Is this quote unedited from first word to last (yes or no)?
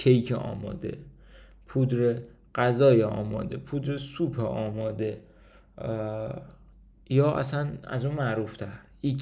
yes